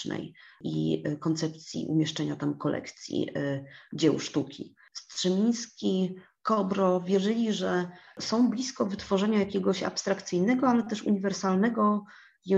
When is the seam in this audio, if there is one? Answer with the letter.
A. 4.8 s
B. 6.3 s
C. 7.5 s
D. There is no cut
D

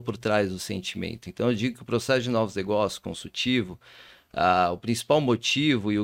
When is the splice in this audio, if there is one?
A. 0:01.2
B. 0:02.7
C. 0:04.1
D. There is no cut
D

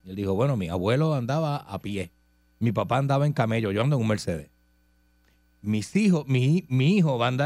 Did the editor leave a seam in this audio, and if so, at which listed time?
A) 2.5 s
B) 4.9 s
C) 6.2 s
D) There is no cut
D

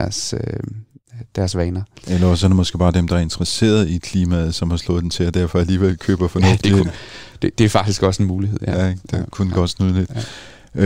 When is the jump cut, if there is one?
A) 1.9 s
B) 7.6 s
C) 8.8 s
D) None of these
B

